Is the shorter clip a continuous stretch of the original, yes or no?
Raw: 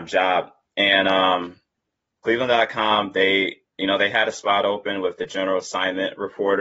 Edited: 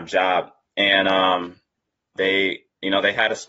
no